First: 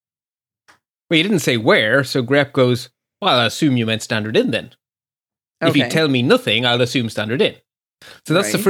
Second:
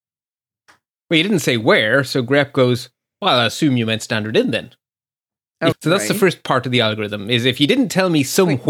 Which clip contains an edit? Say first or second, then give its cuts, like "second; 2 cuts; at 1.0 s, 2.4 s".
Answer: second; 1 cut; at 5.7 s